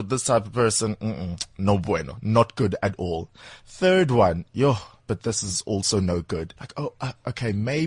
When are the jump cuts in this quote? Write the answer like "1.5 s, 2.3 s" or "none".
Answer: 5.0 s, 6.6 s